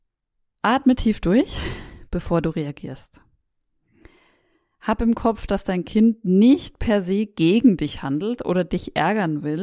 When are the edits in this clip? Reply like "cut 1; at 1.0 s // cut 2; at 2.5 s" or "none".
none